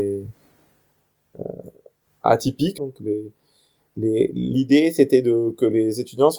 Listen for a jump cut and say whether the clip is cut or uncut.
cut